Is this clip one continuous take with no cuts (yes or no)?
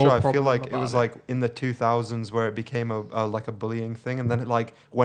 yes